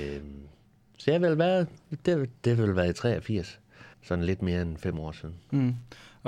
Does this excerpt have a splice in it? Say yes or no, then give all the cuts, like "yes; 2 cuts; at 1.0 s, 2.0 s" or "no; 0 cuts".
yes; 1 cut; at 3.9 s